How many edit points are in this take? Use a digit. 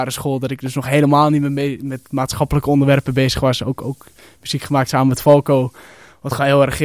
0